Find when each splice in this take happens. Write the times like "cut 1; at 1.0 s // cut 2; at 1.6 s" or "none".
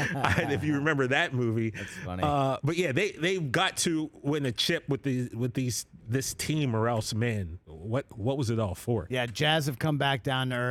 none